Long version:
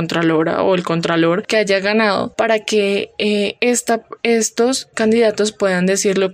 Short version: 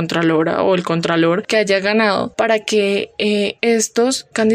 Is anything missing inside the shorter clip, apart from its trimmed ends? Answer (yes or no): yes